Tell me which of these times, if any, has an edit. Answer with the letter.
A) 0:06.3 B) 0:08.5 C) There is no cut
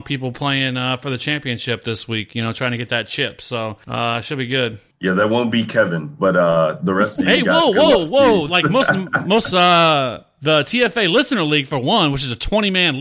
B